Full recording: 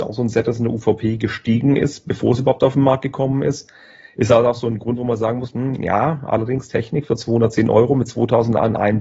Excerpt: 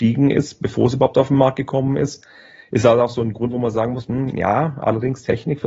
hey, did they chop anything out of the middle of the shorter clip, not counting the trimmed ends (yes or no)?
no